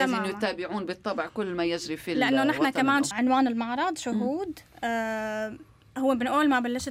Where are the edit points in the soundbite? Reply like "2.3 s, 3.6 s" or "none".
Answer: 3.1 s